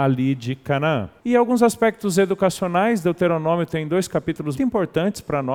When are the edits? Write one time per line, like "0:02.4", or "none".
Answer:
0:01.2
0:04.6

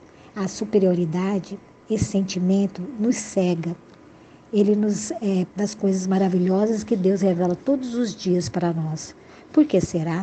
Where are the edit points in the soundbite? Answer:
0:05.5

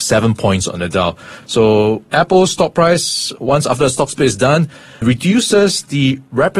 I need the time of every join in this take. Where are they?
none

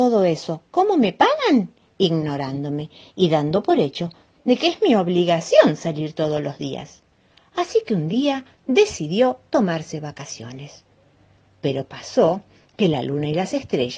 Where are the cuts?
none

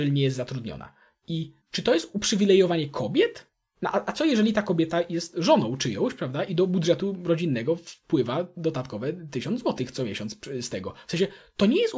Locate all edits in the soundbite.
0:01.6

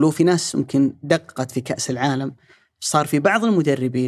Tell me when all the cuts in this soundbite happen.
none

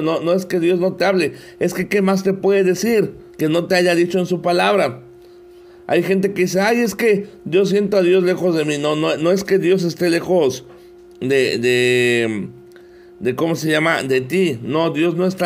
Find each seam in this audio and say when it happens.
0:03.3

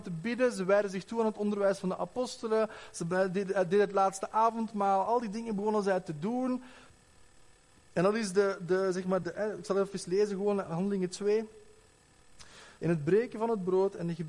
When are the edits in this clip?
0:09.2
0:12.8

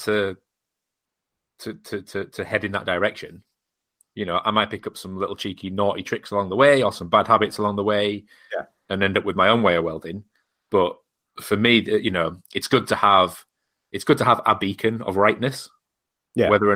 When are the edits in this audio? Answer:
none

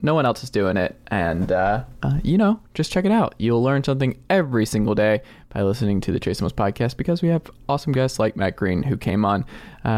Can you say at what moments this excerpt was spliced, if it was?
none

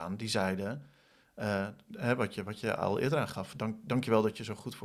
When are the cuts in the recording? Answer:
none

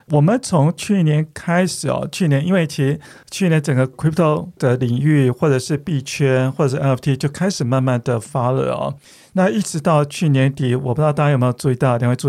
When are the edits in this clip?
none

